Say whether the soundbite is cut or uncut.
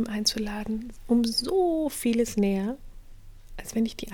uncut